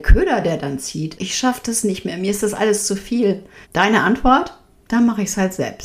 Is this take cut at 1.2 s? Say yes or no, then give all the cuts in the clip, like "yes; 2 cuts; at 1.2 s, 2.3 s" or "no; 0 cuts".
yes; 2 cuts; at 1.2 s, 3.6 s